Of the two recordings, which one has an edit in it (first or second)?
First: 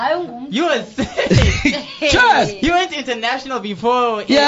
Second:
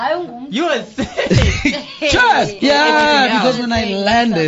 second